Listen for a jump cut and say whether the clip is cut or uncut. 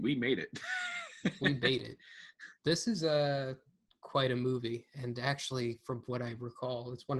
uncut